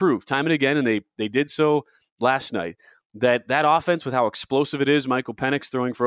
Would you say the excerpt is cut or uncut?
uncut